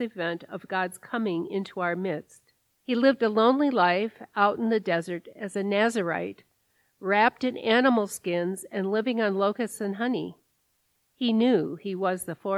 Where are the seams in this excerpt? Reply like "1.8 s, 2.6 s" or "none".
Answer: 2.8 s